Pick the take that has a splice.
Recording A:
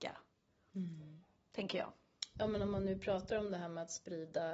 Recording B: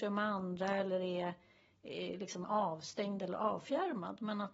A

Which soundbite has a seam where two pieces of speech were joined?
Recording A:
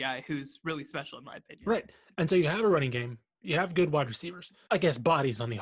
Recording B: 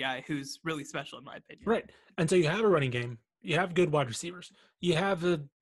A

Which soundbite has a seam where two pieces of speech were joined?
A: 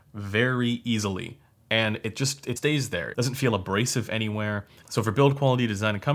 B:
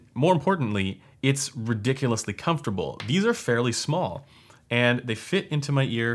A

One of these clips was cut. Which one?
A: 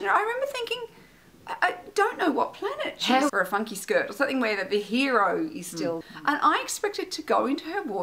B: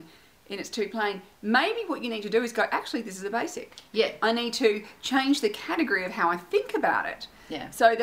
A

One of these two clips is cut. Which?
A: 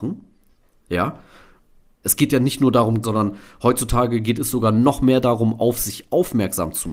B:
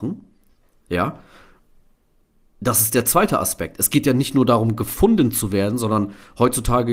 A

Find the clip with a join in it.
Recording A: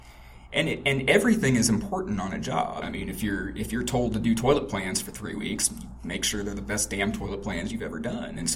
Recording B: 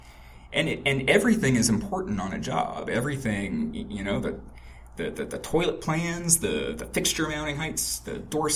A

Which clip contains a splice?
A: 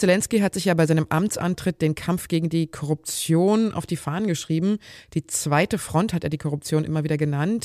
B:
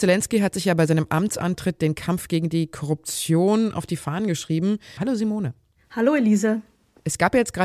B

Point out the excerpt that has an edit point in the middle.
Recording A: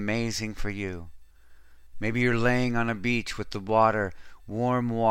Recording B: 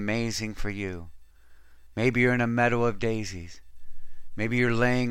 A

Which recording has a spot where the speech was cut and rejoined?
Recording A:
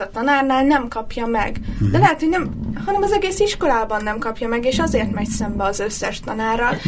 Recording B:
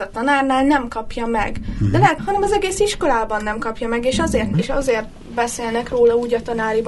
B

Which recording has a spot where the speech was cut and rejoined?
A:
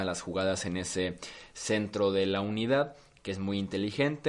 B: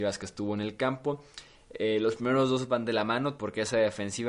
B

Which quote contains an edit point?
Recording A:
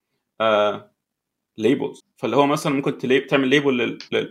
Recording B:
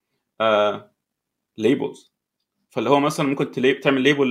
A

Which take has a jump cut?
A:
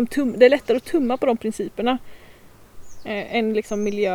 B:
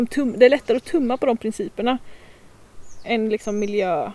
B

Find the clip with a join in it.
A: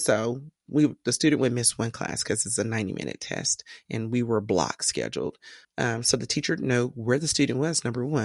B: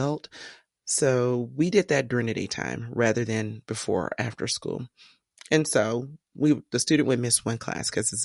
A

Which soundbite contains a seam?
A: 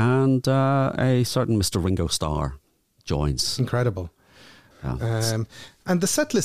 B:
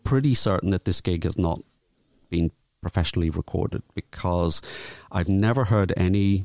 A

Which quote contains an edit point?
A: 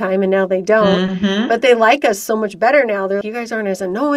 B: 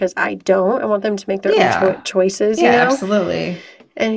A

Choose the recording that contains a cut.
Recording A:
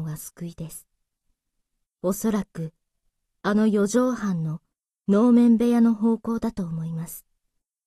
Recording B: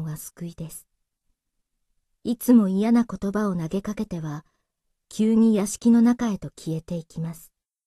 A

